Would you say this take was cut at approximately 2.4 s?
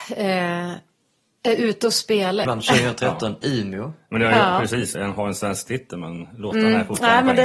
yes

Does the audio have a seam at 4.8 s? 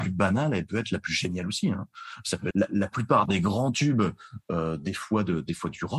no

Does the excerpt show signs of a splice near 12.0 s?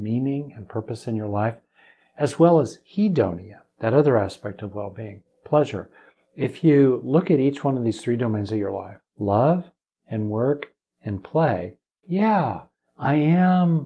yes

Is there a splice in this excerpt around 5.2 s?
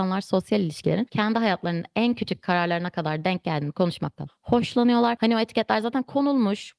yes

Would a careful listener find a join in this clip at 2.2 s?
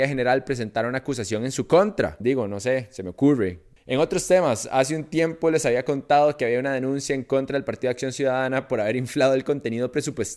yes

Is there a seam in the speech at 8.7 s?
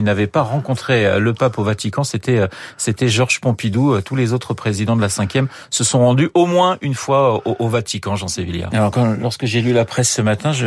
yes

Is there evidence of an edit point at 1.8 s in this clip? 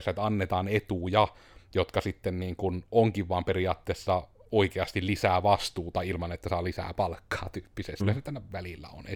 no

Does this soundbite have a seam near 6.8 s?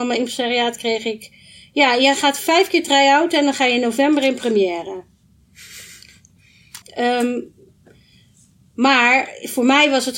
yes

